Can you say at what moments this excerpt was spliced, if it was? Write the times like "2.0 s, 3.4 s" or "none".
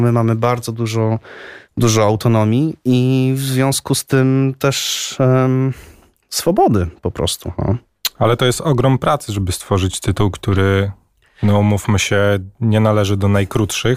none